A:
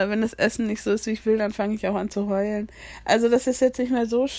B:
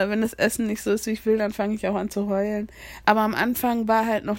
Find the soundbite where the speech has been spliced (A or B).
B